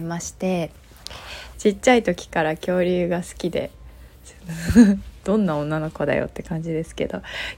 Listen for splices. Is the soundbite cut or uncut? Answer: cut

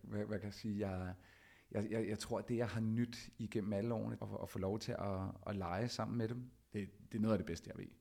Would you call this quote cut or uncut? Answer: cut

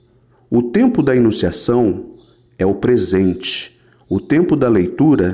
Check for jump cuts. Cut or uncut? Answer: uncut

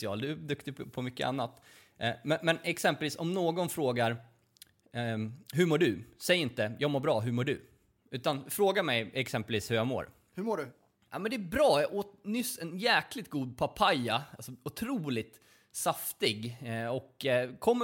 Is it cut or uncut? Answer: uncut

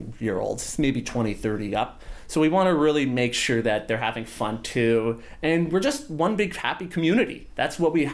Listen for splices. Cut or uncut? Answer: uncut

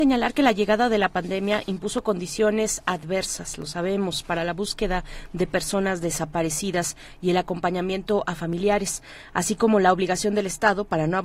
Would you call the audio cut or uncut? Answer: uncut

